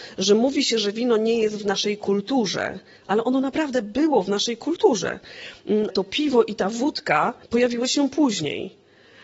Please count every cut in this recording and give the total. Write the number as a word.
two